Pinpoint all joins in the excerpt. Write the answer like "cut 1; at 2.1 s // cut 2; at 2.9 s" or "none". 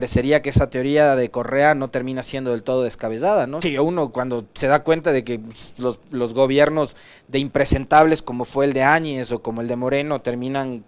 cut 1; at 3.6 s // cut 2; at 5.8 s